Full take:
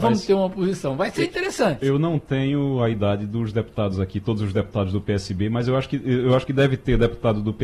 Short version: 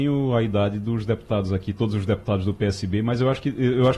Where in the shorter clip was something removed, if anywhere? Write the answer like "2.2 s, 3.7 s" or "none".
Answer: none